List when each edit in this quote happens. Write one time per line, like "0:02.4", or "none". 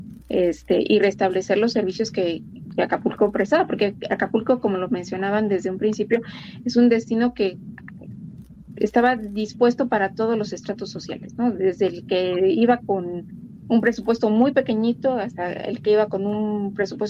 0:02.7